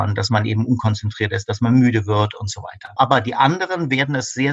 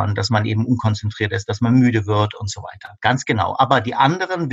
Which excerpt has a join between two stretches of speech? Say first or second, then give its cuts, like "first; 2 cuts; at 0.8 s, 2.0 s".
first; 1 cut; at 3.0 s